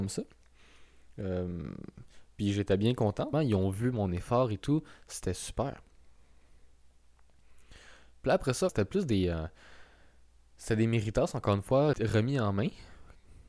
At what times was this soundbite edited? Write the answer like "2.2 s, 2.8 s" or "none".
3.3 s, 8.7 s, 11.9 s